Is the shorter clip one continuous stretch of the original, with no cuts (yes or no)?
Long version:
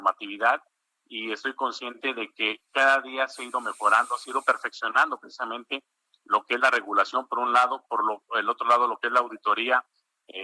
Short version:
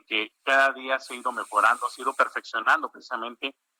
yes